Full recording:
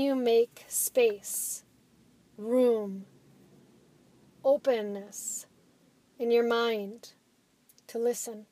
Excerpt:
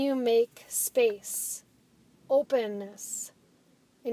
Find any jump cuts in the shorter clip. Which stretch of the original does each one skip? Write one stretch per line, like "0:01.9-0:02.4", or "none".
0:02.1-0:04.3